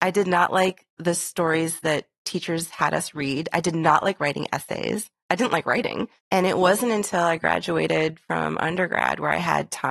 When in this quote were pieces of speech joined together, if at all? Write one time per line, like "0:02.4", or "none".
0:06.2